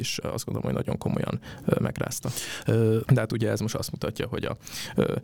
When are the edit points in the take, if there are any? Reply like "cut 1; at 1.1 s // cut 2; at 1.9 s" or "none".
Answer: cut 1; at 3.0 s